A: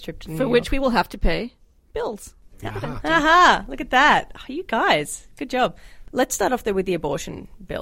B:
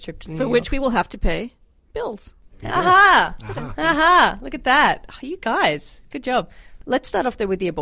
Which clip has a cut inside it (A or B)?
A